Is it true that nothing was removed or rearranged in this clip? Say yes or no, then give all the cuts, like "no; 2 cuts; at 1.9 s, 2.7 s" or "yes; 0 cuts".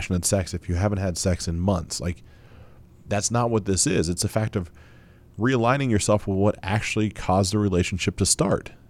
yes; 0 cuts